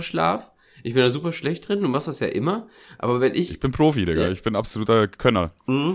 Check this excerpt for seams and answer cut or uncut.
uncut